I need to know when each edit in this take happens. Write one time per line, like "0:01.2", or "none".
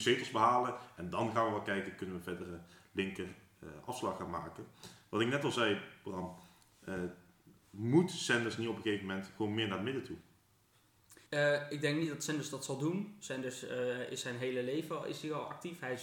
0:11.3